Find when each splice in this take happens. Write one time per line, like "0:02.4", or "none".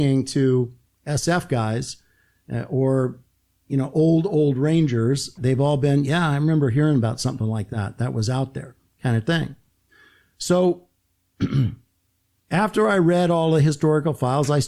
0:05.4